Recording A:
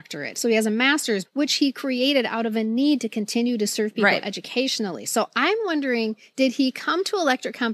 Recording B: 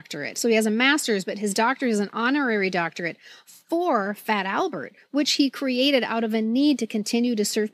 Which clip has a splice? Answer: A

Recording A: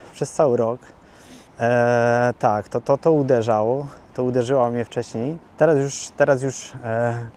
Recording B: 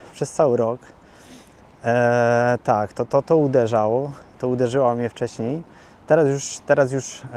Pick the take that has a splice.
A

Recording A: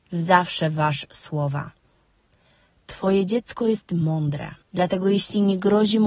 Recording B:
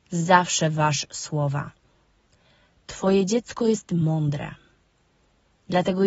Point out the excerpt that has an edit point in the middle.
A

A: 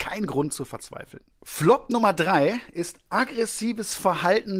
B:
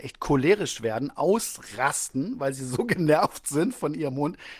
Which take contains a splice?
A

